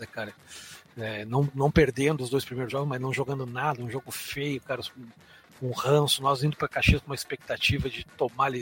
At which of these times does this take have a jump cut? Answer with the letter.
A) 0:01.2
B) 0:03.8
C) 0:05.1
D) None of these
D